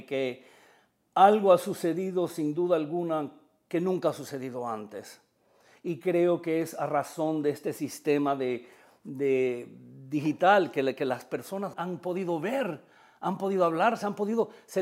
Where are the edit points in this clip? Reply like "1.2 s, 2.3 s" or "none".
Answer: 11.7 s